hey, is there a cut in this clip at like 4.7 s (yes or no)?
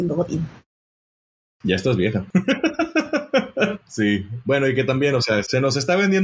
no